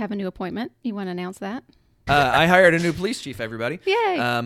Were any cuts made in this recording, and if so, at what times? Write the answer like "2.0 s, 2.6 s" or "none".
2.1 s